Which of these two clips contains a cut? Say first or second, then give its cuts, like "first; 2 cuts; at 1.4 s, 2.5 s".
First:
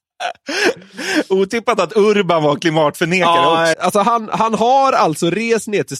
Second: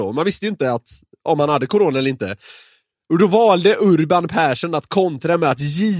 first; 1 cut; at 3.7 s